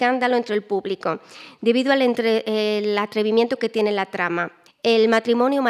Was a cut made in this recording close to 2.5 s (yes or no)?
no